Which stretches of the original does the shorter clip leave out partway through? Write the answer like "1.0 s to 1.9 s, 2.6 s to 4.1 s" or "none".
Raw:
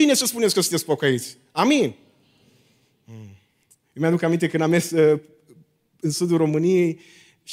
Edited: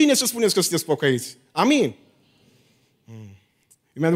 none